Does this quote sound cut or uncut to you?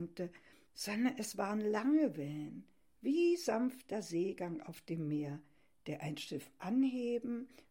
uncut